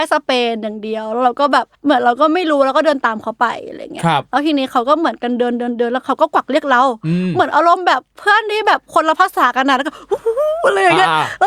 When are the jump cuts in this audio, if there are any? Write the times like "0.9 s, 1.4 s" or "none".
1.7 s